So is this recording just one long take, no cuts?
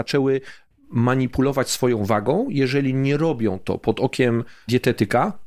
yes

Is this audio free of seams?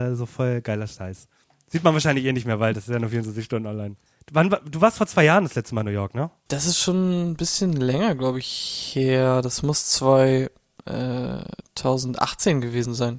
yes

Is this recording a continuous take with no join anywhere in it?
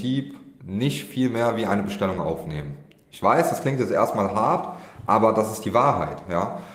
yes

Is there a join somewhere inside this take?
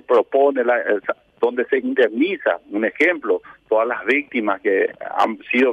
no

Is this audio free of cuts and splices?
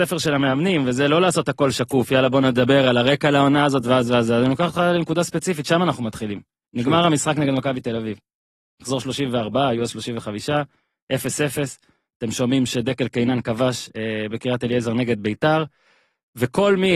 yes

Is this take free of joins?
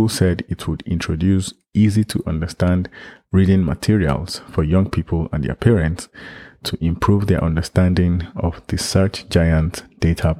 yes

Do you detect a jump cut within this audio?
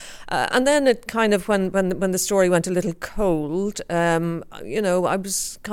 no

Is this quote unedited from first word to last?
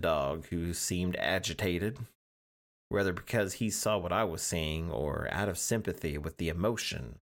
yes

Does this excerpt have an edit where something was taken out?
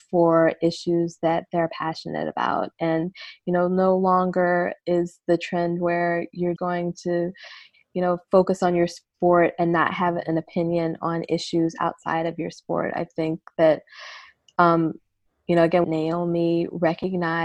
yes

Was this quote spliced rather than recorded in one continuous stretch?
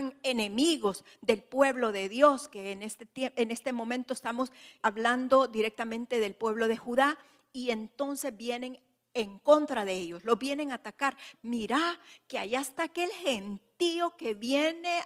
yes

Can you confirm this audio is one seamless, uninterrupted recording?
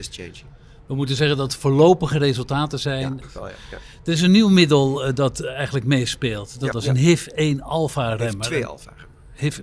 no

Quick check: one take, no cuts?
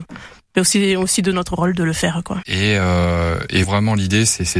no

